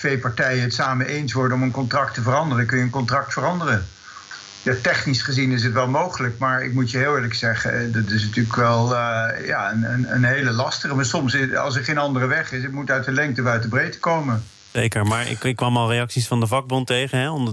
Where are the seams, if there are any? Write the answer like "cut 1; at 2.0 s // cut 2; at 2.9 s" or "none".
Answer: none